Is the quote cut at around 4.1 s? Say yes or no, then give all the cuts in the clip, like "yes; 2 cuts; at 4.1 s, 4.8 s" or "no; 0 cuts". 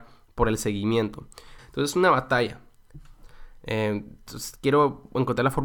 no; 1 cut; at 1.6 s